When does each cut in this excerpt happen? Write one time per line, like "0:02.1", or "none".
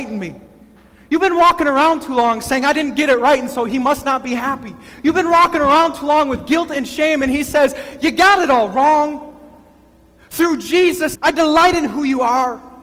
0:11.1